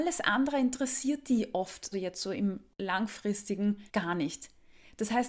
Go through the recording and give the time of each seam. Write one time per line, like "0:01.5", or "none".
0:01.9
0:03.9